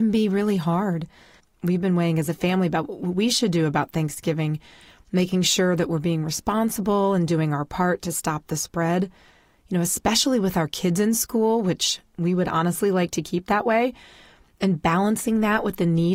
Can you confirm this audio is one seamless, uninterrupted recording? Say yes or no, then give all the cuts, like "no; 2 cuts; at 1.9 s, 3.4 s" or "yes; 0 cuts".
yes; 0 cuts